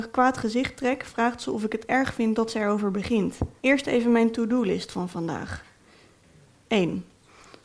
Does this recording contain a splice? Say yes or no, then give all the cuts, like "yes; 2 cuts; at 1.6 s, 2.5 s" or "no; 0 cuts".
yes; 1 cut; at 3.6 s